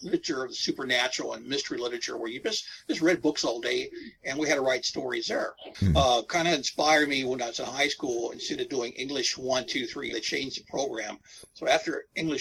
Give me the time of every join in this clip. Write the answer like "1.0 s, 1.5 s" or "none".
5.7 s, 10.1 s